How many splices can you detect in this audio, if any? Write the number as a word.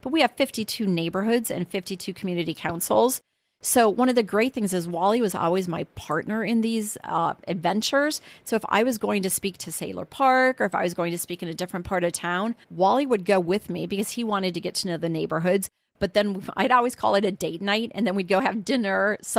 one